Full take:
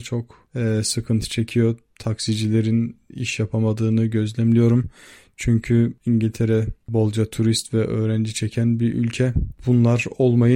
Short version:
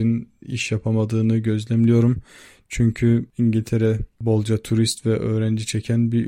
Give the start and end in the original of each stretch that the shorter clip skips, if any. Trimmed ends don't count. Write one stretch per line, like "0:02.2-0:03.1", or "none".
none